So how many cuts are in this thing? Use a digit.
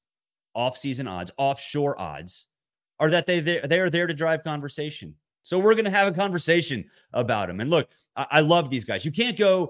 0